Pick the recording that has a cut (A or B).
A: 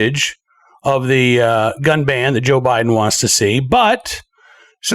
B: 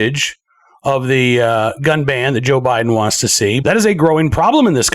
B